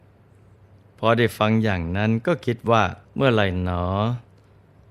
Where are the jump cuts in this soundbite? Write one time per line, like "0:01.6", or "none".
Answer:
0:03.0